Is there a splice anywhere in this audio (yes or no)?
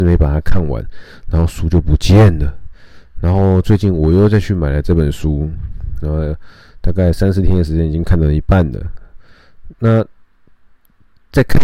yes